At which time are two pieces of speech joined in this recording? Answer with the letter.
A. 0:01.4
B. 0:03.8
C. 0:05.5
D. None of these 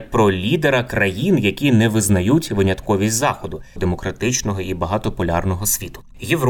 B